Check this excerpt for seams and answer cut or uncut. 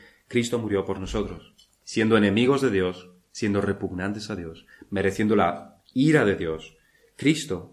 uncut